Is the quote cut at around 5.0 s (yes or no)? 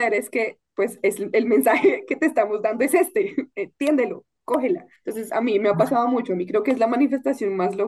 yes